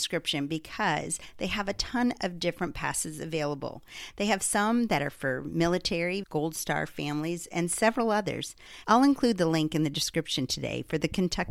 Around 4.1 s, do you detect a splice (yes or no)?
no